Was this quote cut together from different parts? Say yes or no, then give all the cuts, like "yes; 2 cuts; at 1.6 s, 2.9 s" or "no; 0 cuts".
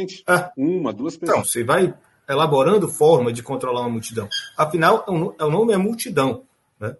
yes; 1 cut; at 1.4 s